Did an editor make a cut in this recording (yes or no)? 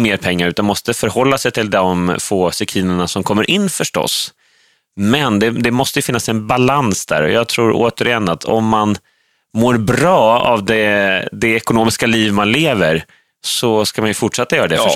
no